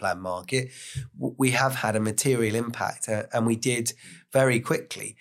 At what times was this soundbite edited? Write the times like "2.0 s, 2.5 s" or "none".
none